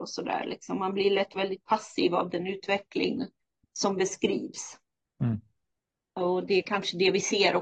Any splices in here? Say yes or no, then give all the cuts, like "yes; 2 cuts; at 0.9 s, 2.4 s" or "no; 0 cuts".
no; 0 cuts